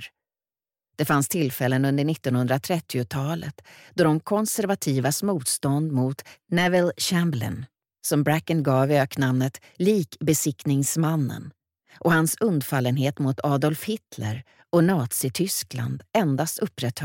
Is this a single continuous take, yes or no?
yes